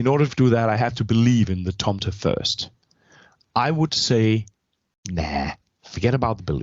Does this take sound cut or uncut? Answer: uncut